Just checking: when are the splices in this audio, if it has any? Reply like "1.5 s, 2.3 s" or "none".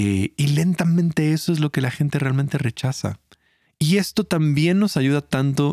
3.7 s